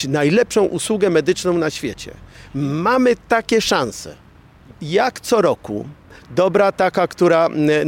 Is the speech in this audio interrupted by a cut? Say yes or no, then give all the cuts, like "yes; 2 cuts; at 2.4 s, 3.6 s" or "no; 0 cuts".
yes; 2 cuts; at 4.7 s, 6.2 s